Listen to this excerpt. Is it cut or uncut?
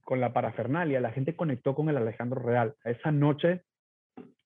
cut